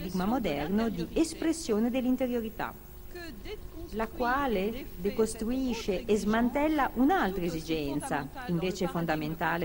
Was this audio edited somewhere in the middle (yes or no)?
no